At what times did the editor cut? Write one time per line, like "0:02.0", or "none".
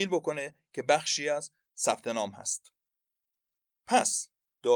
none